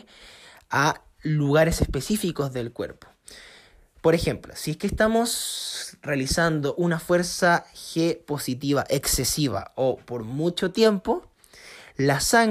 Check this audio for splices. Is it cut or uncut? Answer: uncut